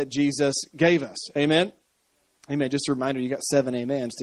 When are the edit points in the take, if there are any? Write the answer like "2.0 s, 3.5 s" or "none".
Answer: none